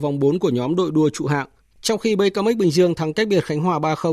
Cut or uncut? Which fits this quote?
uncut